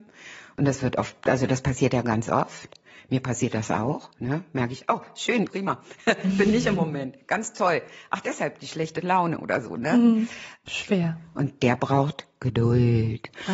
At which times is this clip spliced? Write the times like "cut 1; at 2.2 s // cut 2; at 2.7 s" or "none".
cut 1; at 5.4 s // cut 2; at 10.6 s

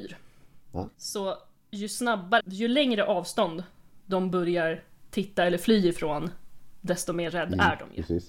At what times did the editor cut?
cut 1; at 0.9 s // cut 2; at 2.4 s

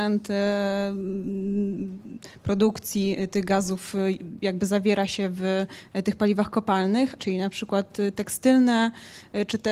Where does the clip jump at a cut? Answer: cut 1; at 7.2 s

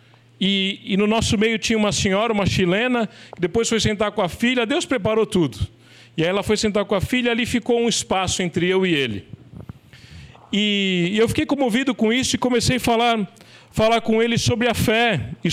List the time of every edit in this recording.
none

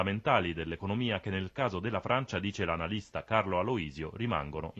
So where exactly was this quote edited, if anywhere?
none

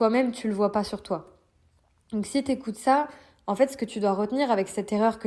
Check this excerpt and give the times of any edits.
none

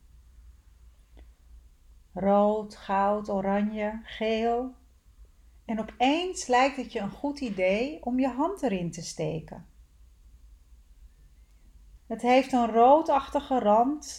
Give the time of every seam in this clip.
cut 1; at 5.5 s // cut 2; at 12.0 s

